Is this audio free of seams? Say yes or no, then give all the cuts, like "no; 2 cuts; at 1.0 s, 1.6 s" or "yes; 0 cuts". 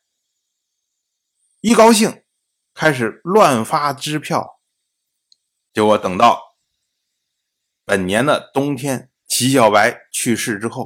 no; 2 cuts; at 5.6 s, 9.2 s